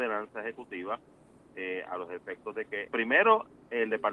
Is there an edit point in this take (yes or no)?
yes